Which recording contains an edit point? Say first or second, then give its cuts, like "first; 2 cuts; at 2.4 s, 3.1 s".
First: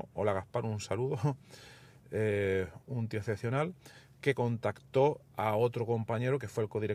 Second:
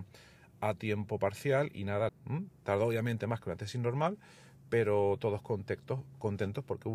second; 1 cut; at 2.1 s